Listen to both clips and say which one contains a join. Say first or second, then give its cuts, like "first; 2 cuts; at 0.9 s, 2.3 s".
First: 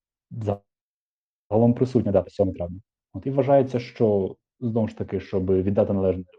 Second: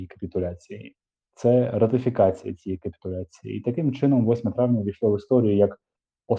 second; 1 cut; at 1.2 s